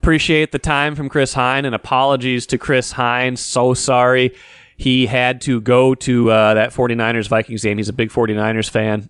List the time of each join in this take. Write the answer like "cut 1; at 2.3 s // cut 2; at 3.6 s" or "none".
none